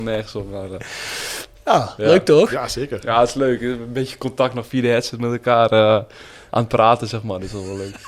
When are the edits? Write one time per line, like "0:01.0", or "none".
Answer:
none